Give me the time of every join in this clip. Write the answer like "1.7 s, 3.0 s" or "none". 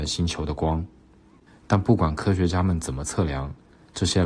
1.5 s